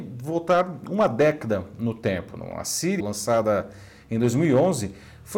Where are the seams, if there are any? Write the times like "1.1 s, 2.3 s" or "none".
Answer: 3.0 s